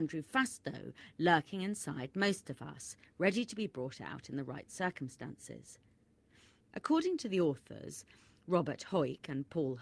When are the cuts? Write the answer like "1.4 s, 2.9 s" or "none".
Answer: 6.6 s